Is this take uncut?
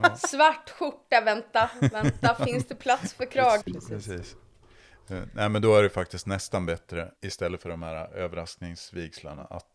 no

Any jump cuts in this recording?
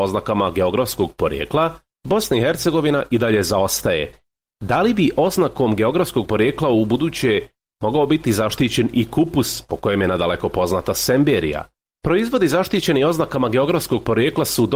yes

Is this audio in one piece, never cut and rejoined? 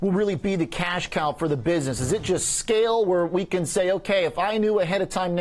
yes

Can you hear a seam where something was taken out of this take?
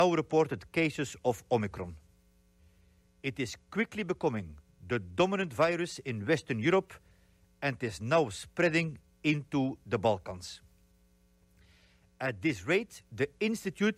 no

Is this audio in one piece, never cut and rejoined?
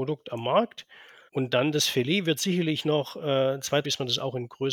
no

